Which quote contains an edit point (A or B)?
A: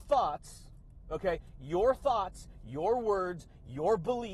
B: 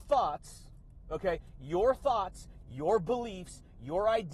B